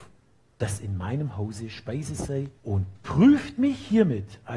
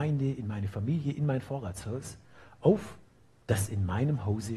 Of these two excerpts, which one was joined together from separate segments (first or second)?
first